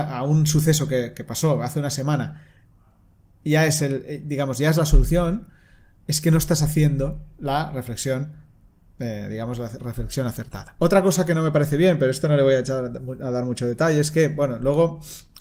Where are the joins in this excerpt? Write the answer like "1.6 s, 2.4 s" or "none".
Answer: 10.8 s